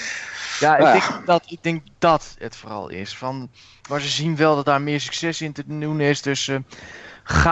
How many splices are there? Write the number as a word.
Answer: one